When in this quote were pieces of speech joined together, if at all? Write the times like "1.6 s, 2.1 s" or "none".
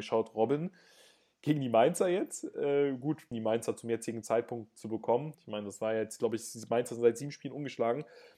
3.3 s, 5.3 s